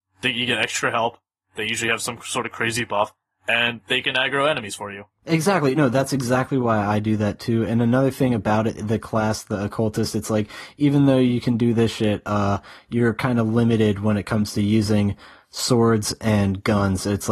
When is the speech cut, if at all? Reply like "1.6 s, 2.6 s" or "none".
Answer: none